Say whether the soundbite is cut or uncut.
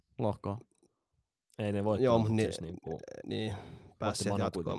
cut